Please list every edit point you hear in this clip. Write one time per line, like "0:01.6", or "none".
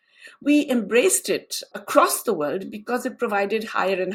0:01.7